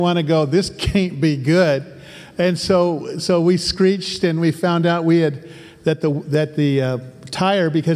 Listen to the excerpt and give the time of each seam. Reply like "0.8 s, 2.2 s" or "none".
none